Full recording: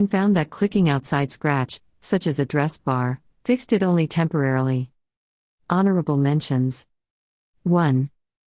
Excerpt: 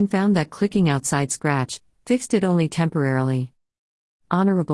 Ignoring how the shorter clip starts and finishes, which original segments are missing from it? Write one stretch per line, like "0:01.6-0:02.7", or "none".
0:01.9-0:03.3